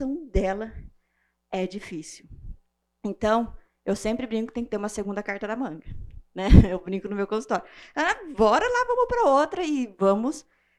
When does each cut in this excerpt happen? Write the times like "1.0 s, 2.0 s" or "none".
none